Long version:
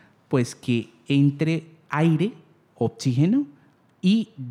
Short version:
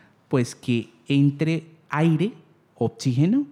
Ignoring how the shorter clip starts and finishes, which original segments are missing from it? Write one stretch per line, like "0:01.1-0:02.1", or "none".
none

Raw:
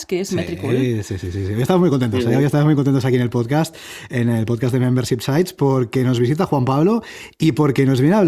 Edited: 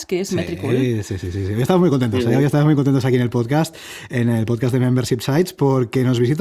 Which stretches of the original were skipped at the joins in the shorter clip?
none

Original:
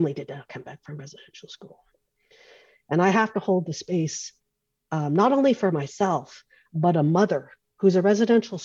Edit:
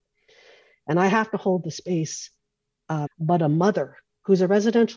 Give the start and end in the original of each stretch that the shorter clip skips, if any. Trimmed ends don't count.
0:05.1-0:06.6

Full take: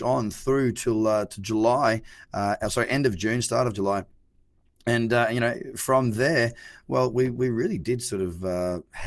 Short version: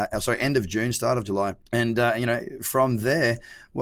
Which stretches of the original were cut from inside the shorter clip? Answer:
0:04.1-0:04.8

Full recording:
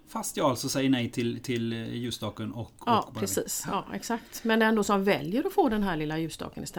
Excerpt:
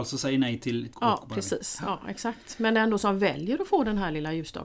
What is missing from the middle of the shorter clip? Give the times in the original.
0:01.4-0:02.8

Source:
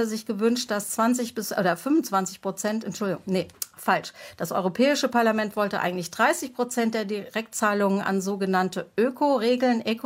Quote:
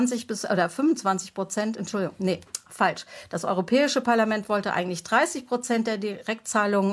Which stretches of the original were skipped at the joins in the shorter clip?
none

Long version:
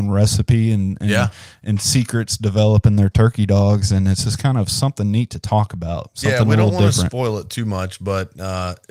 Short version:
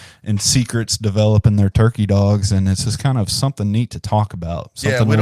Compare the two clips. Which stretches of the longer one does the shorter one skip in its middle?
none

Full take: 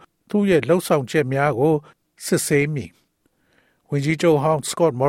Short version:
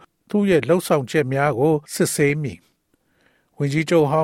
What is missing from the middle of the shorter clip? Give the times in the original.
0:01.8-0:02.2

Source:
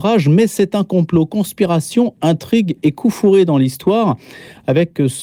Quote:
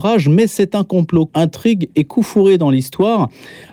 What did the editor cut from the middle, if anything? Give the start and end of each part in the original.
0:01.3-0:02.2

